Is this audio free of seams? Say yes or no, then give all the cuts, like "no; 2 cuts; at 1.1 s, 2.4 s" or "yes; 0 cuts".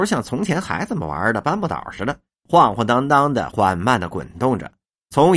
yes; 0 cuts